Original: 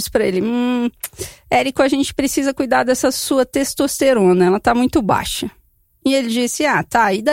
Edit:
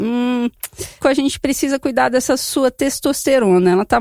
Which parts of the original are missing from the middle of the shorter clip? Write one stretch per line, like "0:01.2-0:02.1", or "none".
0:01.4-0:01.7